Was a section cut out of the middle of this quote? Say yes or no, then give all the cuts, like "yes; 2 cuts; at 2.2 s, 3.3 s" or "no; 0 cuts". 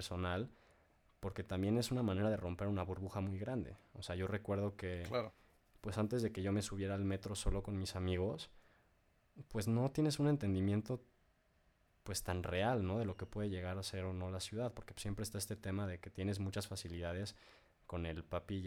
no; 0 cuts